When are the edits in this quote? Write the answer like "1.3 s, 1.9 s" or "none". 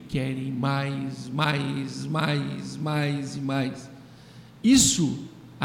none

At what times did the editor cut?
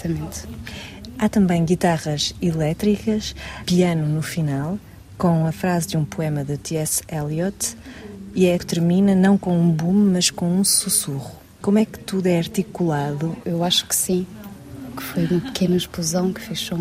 8.6 s, 13.4 s

